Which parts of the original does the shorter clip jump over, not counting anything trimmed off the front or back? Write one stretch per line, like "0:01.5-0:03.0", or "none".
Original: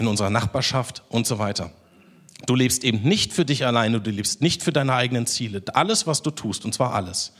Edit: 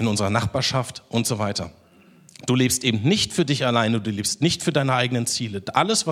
none

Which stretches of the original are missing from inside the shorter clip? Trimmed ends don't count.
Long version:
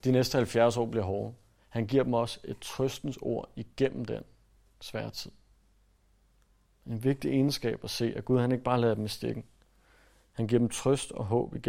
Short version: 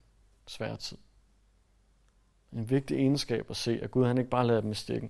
none

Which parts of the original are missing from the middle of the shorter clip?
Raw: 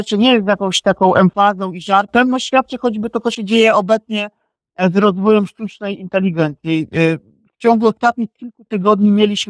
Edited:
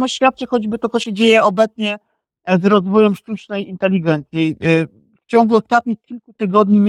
none

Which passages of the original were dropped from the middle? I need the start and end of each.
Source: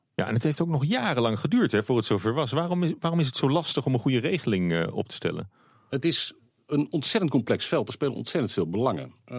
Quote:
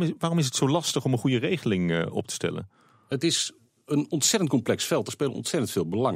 none

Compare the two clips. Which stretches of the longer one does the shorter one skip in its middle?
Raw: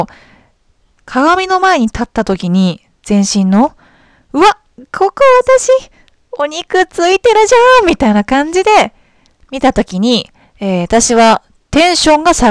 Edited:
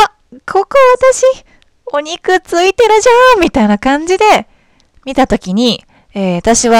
none

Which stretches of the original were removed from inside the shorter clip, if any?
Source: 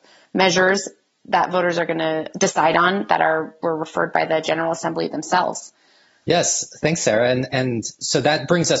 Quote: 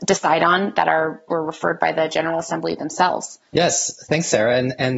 0:05.8-0:06.2

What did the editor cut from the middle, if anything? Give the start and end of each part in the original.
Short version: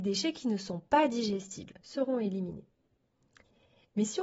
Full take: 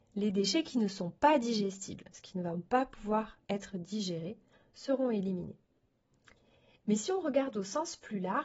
0:02.1-0:04.7

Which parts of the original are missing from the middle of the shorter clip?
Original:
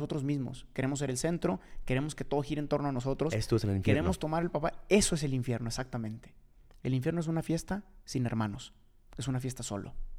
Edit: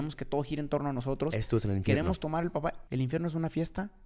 0:04.9-0:06.8

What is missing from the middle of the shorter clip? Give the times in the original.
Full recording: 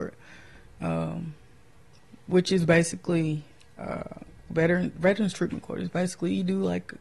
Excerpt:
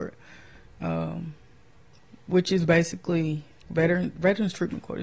0:03.6-0:04.4

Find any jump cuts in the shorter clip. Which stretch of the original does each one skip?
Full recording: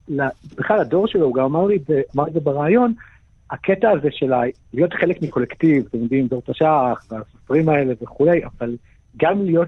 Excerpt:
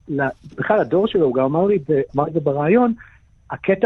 none

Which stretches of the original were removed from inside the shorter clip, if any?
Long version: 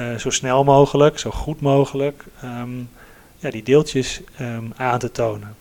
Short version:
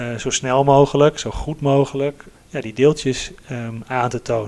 0:02.3-0:03.2

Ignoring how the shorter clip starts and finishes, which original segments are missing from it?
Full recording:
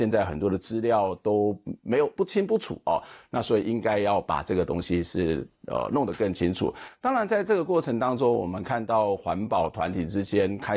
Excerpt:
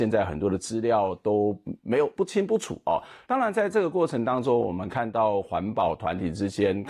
0:03.2-0:07.0

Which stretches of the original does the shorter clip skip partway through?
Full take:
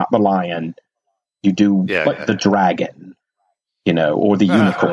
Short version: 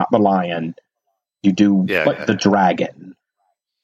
none

